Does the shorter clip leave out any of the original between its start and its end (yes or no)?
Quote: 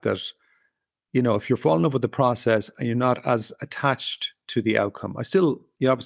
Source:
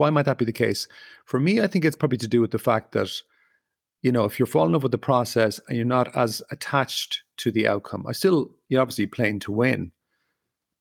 no